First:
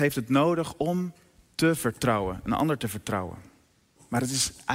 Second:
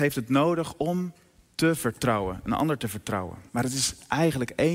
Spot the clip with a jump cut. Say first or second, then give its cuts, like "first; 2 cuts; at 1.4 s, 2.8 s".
second; 1 cut; at 3.5 s